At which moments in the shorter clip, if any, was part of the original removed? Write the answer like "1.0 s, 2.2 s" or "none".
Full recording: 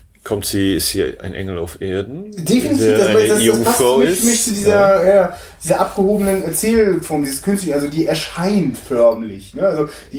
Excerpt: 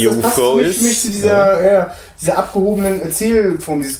none